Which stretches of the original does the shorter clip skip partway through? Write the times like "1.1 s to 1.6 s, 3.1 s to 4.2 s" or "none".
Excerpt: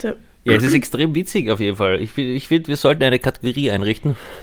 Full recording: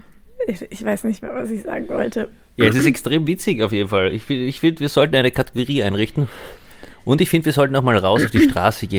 none